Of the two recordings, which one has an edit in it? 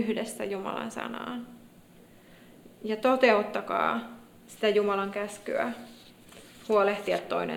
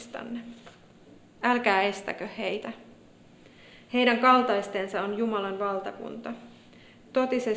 second; 1 cut; at 1.2 s

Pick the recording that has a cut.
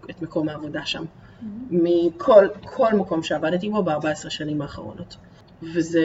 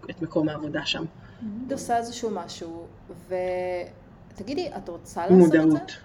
second; 1 cut; at 1.7 s

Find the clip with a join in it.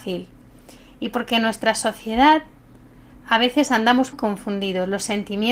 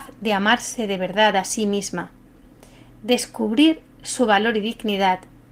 first; 1 cut; at 4.1 s

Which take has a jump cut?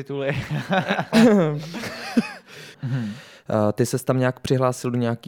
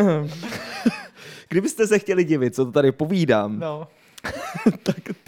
first; 1 cut; at 2.7 s

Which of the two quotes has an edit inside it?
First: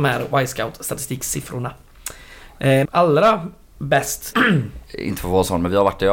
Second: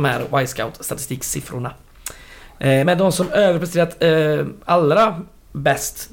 first; 2 cuts; at 2.9 s, 4.3 s

